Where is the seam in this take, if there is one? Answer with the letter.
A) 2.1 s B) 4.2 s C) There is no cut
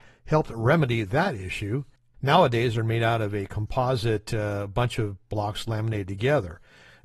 A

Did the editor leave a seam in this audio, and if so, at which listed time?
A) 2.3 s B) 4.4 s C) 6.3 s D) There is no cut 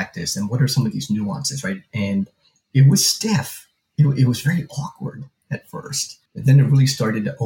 C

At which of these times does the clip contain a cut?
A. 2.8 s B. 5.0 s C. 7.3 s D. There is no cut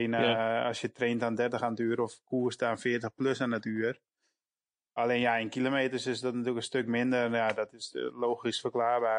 B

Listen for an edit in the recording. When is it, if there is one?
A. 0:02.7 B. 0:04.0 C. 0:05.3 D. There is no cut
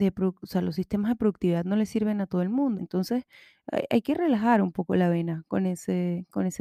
A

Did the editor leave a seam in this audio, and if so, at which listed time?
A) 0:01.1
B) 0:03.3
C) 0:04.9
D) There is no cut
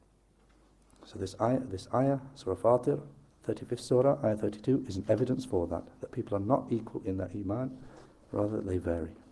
D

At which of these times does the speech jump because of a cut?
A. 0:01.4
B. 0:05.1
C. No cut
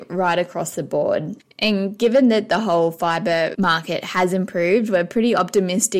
A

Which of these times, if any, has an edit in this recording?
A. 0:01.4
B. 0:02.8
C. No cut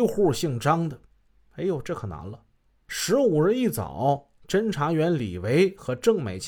C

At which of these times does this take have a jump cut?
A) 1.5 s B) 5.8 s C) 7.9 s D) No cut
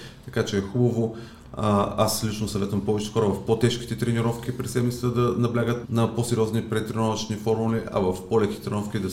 B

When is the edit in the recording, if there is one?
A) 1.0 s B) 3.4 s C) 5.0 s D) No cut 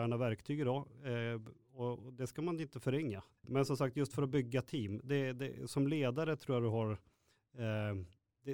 B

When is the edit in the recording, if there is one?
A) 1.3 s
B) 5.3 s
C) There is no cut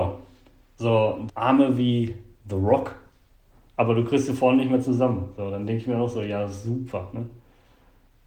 A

